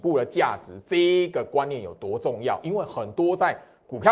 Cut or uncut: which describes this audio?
uncut